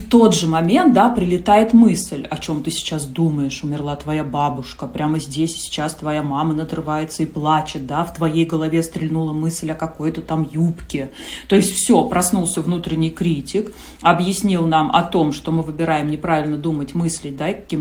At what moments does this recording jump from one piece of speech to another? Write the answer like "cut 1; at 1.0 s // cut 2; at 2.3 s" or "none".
none